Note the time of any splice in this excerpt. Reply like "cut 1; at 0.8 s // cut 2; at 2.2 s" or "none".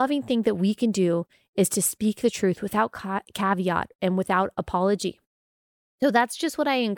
none